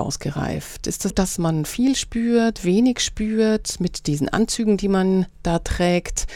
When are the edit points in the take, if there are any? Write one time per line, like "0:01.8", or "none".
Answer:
0:01.1